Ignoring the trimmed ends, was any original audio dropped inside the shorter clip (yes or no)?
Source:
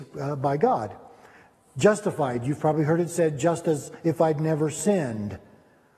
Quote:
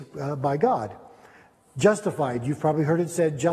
no